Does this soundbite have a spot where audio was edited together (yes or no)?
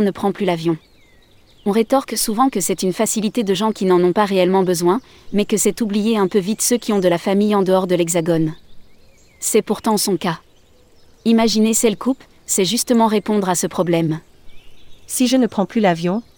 no